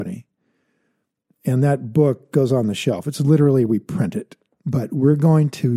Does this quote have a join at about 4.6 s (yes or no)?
yes